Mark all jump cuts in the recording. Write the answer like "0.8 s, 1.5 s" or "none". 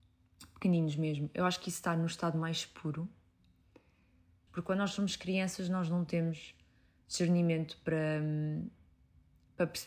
4.5 s